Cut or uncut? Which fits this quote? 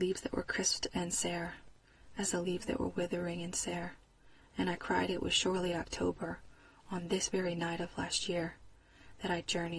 uncut